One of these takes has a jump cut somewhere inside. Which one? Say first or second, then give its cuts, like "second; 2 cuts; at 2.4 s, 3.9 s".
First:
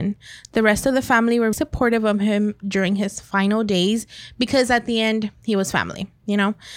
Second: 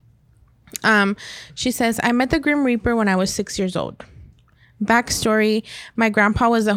first; 1 cut; at 1.5 s